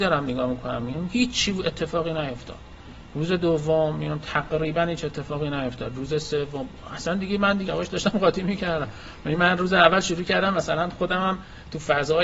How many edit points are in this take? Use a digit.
1